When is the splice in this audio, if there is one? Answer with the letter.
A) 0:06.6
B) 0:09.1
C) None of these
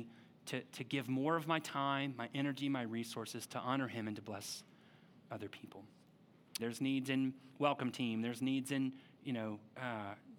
A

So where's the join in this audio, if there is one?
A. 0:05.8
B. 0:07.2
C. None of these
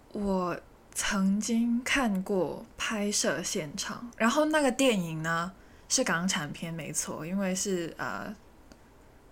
C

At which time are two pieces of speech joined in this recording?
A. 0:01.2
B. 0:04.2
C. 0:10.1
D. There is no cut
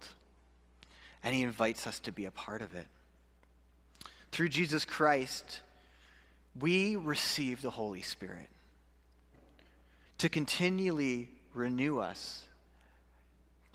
C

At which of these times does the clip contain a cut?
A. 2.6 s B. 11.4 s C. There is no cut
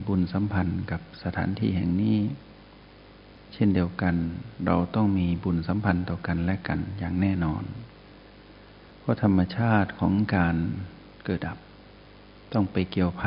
B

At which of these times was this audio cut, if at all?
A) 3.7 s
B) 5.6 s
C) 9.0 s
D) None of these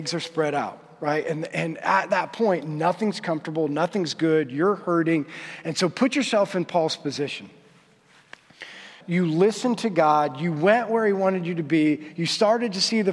C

